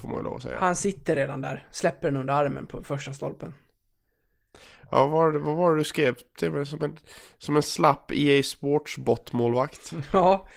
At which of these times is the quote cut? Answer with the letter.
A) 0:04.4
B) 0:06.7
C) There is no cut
C